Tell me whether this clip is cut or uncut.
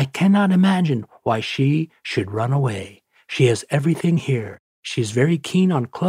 uncut